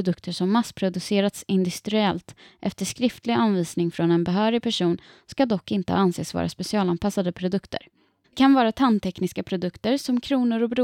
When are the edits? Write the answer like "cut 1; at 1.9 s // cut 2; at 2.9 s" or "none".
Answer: cut 1; at 8.2 s